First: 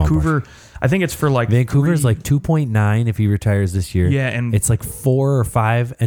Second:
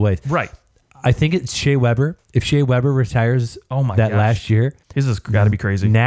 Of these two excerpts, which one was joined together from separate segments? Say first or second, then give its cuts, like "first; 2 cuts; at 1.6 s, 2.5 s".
second; 1 cut; at 4.8 s